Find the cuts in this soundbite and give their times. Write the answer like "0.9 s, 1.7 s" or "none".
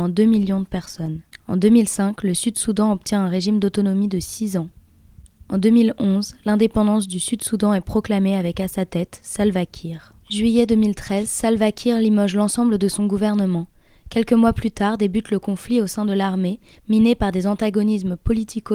10.2 s